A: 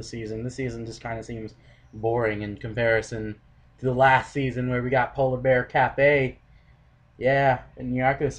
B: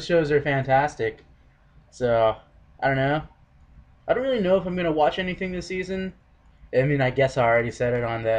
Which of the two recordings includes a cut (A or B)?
B